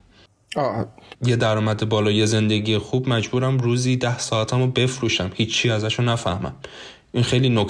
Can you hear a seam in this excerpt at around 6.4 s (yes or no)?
no